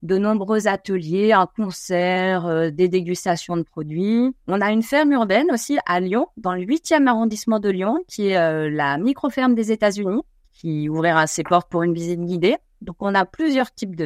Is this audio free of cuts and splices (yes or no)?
no